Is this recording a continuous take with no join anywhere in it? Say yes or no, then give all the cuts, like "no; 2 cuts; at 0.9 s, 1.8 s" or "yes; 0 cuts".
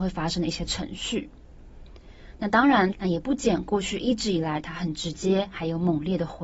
no; 1 cut; at 2.9 s